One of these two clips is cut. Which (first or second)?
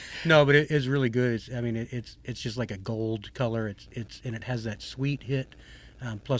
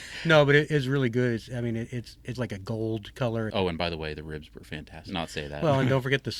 second